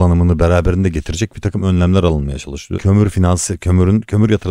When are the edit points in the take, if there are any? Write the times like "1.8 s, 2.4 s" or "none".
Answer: 2.7 s